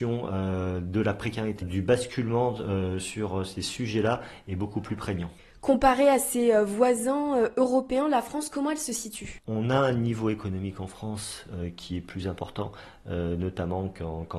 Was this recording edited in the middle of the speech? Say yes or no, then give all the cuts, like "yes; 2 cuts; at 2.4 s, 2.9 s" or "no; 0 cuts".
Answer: yes; 1 cut; at 1.6 s